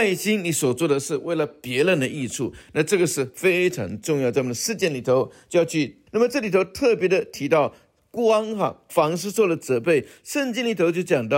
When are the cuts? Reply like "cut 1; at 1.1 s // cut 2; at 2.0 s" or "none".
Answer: cut 1; at 6.1 s